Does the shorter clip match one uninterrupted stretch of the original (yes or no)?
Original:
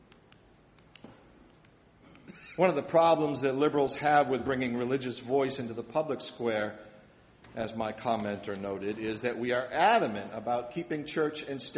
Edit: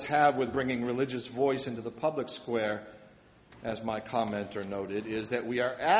yes